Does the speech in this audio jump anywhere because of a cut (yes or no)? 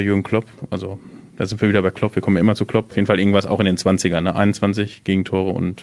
no